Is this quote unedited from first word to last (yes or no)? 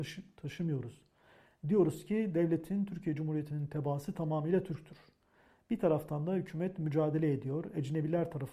yes